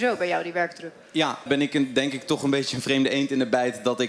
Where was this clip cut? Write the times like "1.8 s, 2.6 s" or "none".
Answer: 1.5 s